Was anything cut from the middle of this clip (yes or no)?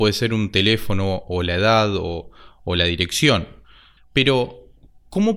yes